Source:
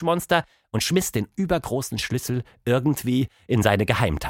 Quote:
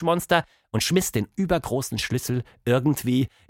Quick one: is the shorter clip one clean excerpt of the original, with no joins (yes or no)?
yes